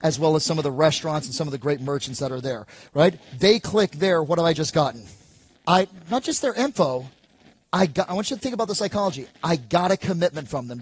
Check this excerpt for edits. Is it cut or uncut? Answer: uncut